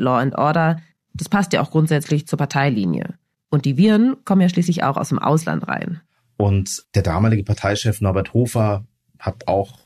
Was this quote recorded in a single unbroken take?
yes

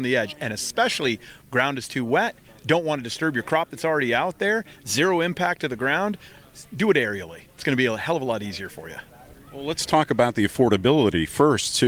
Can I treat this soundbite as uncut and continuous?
yes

